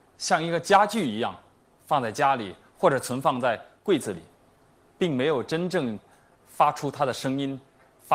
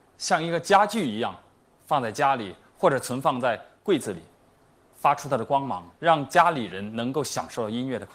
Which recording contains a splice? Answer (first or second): second